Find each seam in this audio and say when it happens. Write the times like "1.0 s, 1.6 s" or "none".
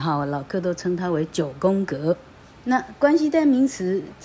2.5 s